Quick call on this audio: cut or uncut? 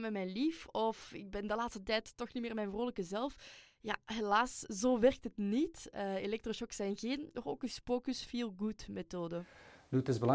uncut